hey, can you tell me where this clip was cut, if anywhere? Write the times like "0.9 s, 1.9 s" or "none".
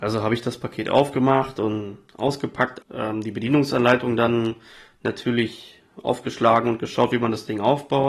2.8 s